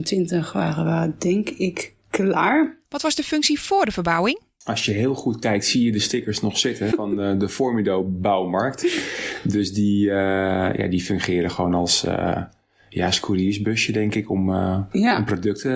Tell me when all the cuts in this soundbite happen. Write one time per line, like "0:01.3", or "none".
none